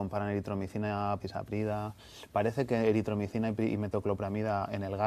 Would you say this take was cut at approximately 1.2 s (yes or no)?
yes